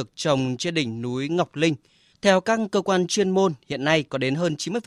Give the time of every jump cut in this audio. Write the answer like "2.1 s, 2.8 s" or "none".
2.1 s